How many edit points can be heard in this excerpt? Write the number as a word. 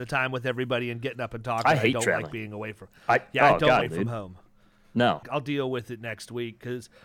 two